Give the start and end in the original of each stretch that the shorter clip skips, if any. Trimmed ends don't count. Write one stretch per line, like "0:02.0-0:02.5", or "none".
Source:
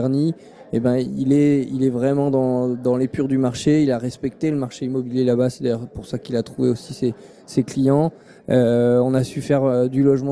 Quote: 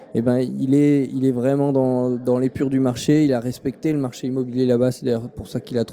none